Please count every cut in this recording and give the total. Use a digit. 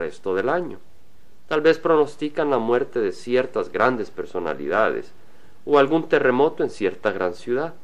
0